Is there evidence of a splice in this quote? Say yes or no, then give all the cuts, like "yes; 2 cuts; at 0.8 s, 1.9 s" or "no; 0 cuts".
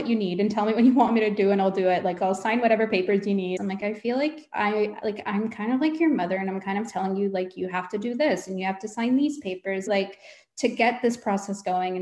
yes; 3 cuts; at 3.6 s, 8.5 s, 9.9 s